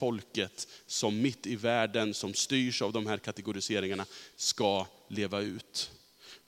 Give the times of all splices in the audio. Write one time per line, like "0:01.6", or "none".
none